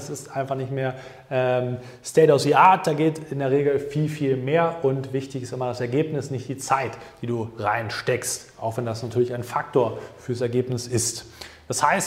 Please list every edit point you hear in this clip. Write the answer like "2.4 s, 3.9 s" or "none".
none